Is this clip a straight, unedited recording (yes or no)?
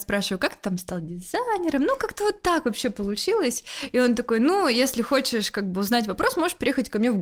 yes